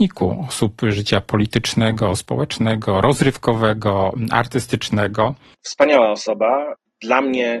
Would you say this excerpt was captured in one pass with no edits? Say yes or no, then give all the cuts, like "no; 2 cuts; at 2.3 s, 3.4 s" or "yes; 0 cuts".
no; 1 cut; at 5.5 s